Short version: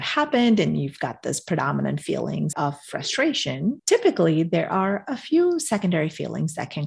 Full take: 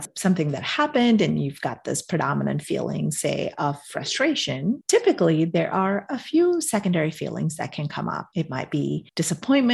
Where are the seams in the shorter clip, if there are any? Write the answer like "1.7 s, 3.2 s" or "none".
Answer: 2.5 s